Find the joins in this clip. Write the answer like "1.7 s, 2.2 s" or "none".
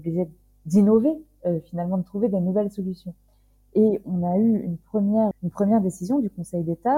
5.3 s